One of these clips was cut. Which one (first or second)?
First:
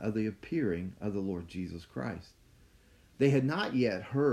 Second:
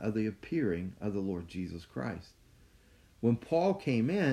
first